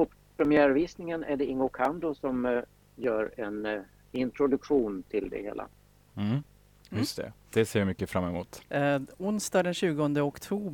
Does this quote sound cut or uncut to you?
cut